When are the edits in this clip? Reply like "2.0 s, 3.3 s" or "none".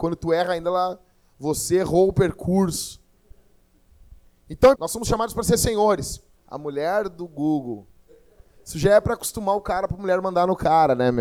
4.7 s, 6.3 s